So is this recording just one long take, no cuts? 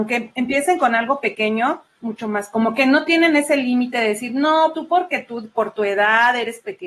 no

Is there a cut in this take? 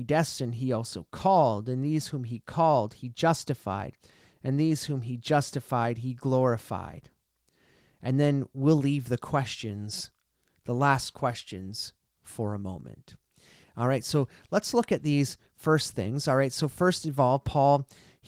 no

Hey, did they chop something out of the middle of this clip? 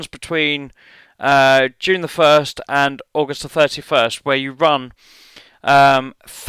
no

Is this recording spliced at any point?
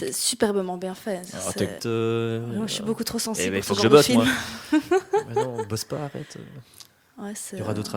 yes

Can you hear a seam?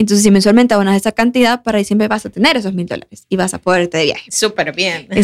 no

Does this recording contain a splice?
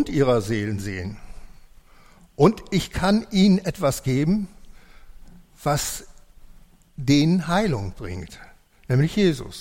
no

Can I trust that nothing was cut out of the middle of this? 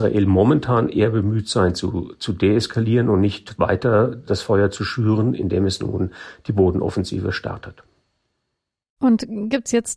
yes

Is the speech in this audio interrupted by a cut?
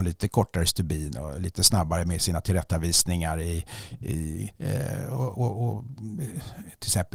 yes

